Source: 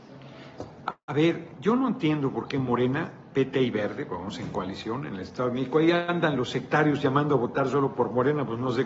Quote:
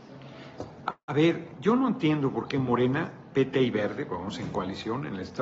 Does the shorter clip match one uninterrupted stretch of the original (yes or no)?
yes